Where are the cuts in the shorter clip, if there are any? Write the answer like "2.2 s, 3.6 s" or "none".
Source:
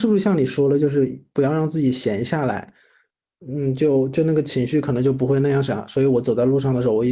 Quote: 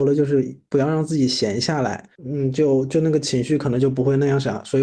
2.1 s